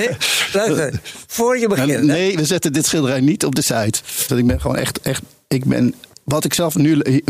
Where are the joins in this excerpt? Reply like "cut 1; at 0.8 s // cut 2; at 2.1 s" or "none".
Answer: cut 1; at 4.3 s